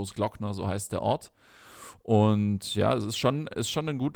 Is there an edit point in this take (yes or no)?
no